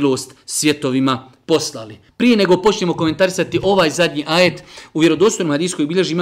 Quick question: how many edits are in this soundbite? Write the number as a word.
one